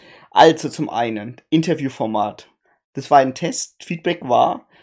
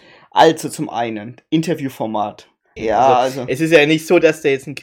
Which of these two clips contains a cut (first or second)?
second